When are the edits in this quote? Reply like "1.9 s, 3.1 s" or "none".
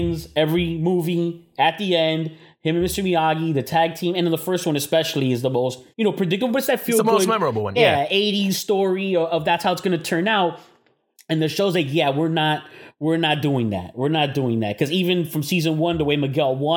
5.9 s